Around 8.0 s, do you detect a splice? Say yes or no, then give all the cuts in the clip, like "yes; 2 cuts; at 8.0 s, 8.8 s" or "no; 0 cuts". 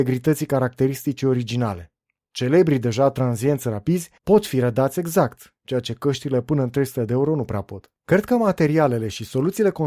yes; 3 cuts; at 2.3 s, 4.2 s, 8.0 s